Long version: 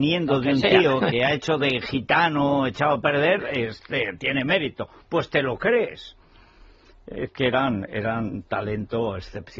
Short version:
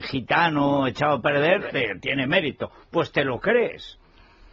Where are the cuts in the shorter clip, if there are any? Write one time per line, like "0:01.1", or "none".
0:01.7